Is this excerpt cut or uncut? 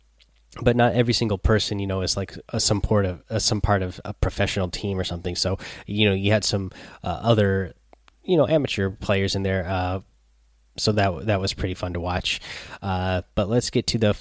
uncut